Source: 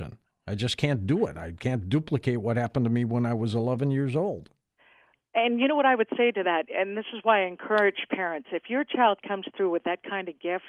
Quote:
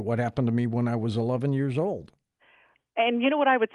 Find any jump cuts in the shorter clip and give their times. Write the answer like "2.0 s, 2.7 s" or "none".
none